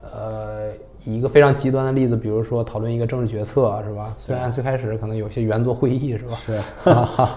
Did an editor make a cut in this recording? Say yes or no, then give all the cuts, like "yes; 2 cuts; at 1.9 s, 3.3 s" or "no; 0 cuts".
yes; 1 cut; at 4.1 s